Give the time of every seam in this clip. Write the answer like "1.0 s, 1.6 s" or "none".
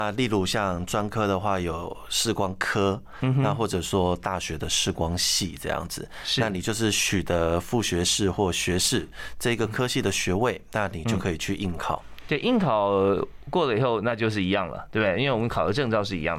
none